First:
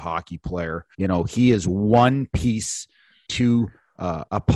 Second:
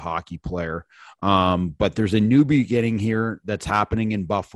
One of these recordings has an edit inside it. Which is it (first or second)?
first